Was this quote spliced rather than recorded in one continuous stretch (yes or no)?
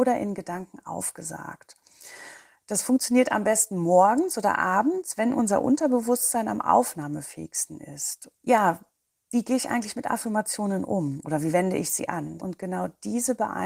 yes